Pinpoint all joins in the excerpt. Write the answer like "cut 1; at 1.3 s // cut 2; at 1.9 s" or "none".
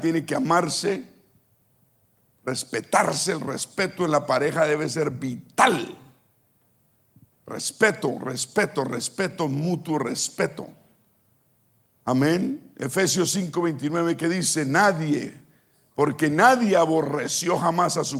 none